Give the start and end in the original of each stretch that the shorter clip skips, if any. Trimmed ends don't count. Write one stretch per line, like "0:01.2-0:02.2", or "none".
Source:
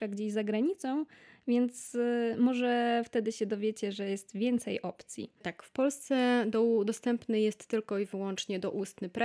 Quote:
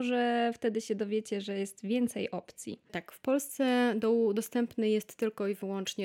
none